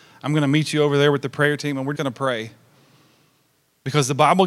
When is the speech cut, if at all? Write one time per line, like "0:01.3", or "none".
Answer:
0:01.9